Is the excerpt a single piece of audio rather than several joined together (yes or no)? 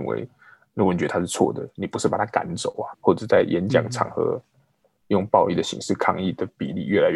no